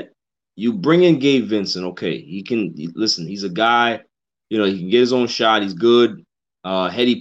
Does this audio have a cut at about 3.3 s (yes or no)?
no